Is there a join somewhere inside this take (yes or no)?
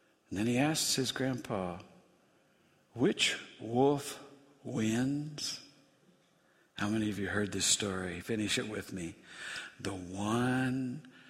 no